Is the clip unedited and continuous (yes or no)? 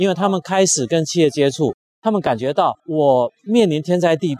yes